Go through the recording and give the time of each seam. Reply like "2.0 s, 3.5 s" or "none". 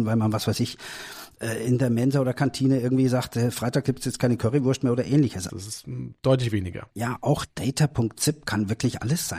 5.5 s, 6.9 s